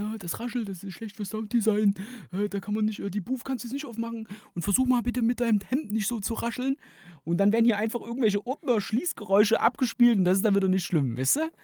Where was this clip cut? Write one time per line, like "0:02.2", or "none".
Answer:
none